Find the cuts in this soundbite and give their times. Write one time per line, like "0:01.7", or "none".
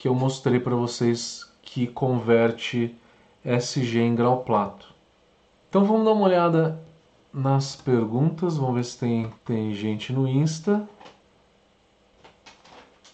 0:05.5
0:09.4